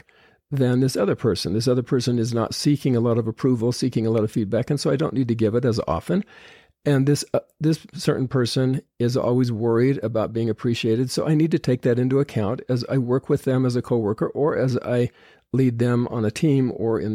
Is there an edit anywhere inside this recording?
no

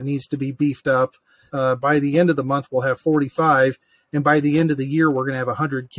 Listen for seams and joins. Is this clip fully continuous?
no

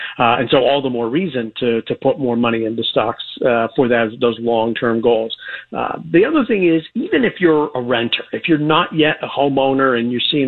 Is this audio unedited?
no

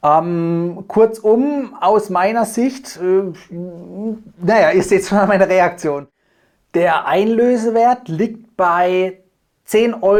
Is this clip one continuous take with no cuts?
yes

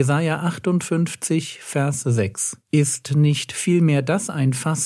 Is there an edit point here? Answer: yes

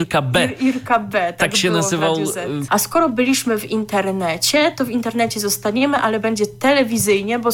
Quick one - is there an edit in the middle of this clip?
yes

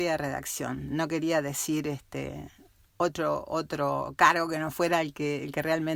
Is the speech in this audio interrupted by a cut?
no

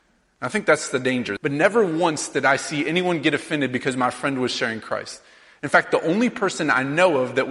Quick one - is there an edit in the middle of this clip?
yes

